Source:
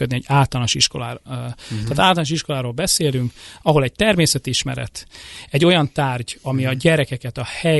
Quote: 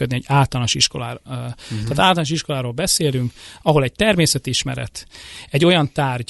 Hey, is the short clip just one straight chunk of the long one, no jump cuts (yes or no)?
yes